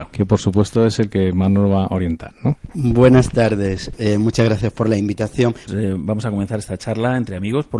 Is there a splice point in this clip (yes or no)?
yes